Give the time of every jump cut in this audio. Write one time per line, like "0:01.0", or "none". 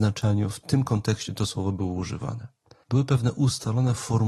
0:02.8